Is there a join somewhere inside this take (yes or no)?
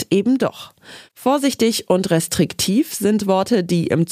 yes